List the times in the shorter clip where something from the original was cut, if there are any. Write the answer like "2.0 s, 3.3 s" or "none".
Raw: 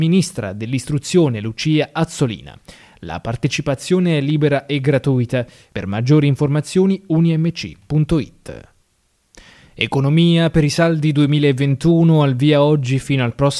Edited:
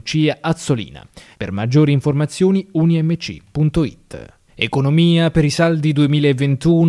1.3 s, 4.5 s